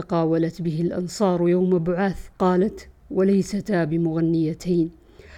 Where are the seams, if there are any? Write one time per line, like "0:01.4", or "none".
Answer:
0:02.3